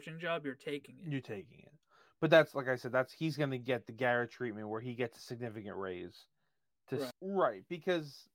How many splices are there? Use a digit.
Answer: 1